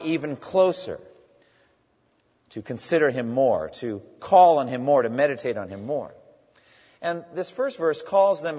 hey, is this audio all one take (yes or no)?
yes